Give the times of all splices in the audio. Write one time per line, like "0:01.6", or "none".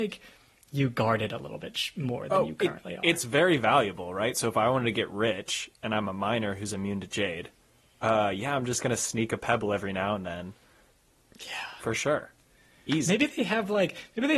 none